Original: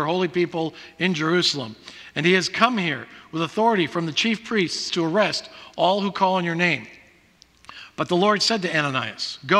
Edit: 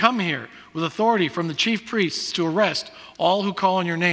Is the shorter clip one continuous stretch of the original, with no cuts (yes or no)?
yes